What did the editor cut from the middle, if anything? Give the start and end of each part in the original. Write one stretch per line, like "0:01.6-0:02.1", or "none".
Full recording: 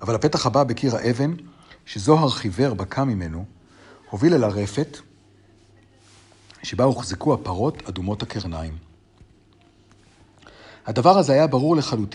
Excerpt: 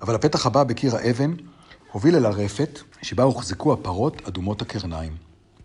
0:01.8-0:04.0
0:05.1-0:06.5